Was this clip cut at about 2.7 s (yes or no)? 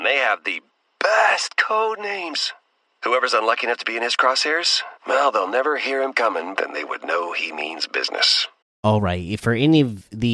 no